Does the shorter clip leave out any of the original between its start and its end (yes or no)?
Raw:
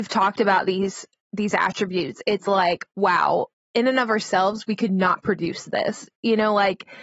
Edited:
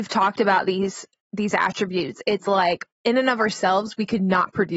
yes